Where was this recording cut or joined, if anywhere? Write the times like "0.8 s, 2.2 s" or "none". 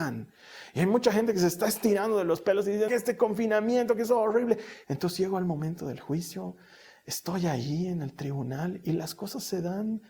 2.9 s, 4.8 s